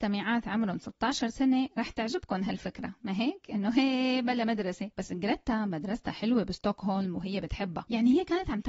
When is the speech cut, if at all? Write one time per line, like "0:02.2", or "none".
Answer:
0:04.9